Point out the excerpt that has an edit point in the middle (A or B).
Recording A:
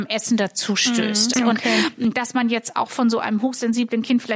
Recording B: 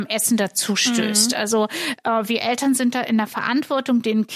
A